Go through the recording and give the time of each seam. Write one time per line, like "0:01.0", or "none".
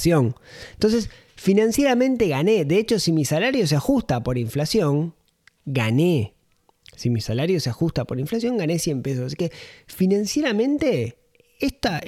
none

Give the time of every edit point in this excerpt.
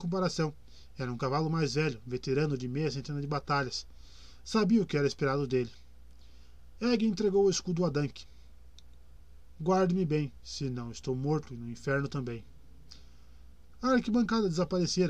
0:09.6
0:13.7

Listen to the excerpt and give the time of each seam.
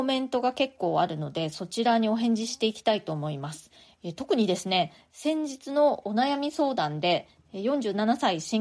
none

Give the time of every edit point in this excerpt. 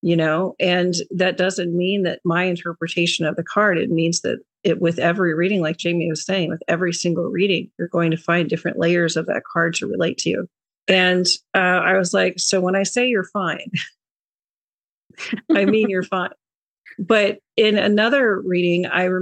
0:10.8

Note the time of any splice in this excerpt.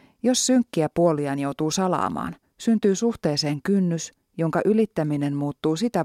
none

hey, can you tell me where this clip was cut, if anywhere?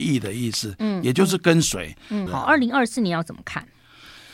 0:02.3

